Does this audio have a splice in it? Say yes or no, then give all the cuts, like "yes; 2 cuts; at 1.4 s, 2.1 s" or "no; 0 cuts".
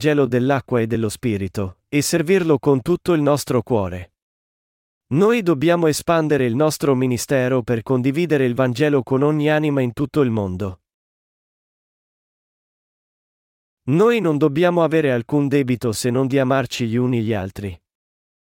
no; 0 cuts